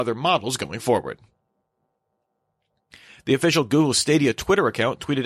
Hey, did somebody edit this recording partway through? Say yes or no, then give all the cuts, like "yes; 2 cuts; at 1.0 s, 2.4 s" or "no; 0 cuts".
no; 0 cuts